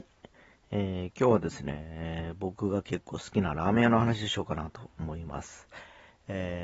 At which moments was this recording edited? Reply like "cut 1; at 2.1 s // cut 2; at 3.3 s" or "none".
none